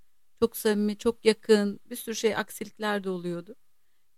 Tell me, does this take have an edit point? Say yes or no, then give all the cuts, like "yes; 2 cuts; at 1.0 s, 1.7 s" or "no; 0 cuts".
no; 0 cuts